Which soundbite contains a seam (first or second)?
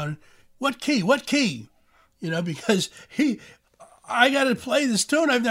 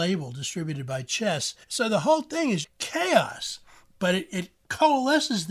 second